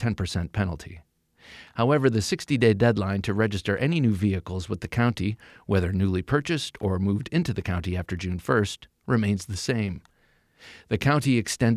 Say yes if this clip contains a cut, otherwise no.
no